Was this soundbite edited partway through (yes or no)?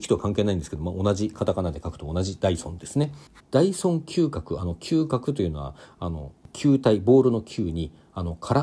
yes